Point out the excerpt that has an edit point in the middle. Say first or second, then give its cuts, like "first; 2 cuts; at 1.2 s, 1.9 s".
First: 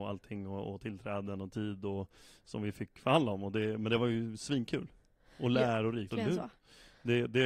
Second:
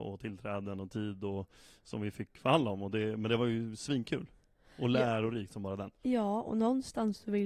first; 1 cut; at 6.1 s